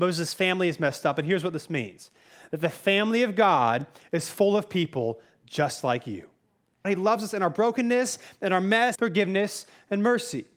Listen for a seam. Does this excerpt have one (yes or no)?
yes